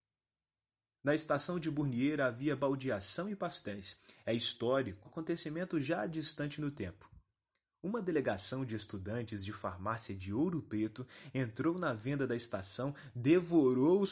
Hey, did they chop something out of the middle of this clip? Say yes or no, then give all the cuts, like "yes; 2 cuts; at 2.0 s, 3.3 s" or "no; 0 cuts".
yes; 1 cut; at 5.0 s